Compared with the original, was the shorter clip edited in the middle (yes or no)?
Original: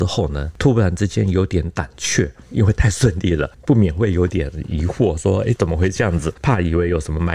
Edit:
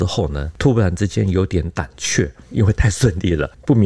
no